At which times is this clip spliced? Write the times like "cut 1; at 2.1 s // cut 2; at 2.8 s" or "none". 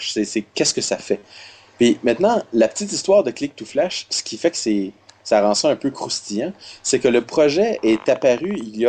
none